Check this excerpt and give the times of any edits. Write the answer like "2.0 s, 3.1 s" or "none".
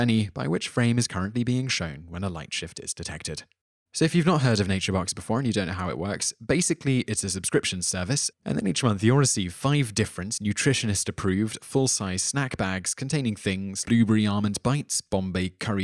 3.9 s, 8.3 s, 13.8 s